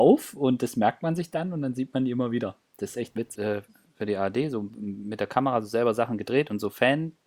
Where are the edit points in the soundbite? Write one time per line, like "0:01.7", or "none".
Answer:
0:03.4

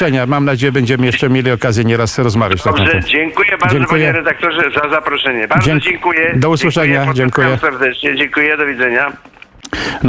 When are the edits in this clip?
none

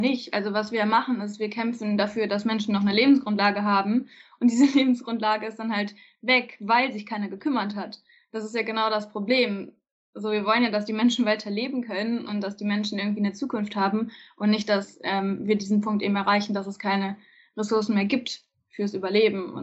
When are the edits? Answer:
none

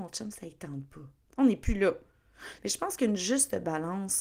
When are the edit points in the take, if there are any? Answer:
0:02.6

